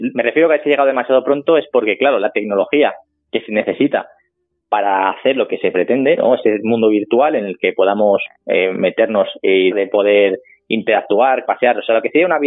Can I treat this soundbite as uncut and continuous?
no; 2 cuts; at 9.7 s, 11.4 s

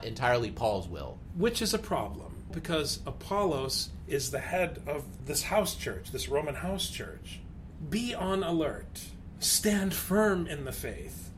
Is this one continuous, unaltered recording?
yes; 0 cuts

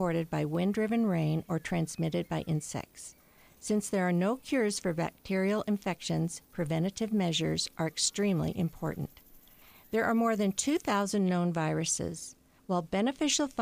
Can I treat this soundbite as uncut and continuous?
yes; 0 cuts

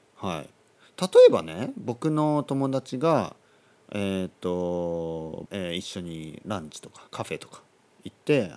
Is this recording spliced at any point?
yes; 2 cuts; at 5.5 s, 7.1 s

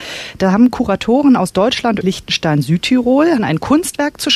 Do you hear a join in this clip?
yes; 2 cuts; at 2.0 s, 3.4 s

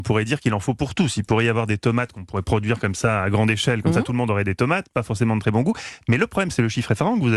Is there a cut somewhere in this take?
no; 0 cuts

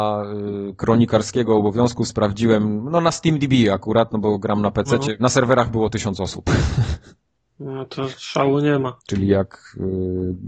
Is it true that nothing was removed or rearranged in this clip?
no; 2 cuts; at 5.2 s, 9.0 s

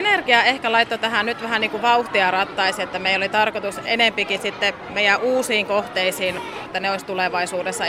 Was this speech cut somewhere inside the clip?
yes; 1 cut; at 6.7 s

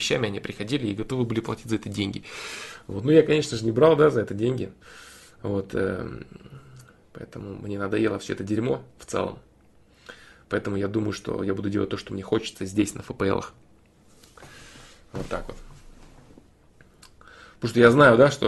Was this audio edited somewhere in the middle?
no; 0 cuts

